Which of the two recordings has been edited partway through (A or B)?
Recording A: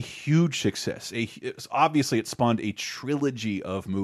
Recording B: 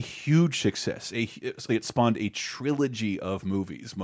B